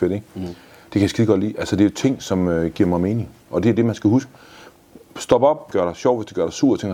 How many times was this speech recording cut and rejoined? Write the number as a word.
one